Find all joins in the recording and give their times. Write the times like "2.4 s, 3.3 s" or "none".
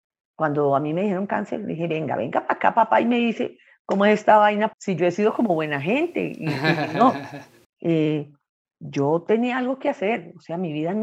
4.7 s, 7.6 s